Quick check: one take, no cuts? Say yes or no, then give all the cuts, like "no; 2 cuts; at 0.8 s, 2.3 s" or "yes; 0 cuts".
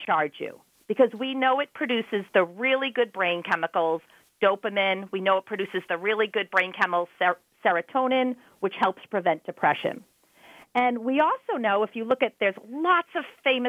yes; 0 cuts